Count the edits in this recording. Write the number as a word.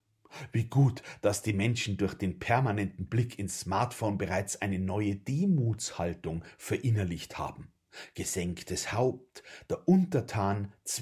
one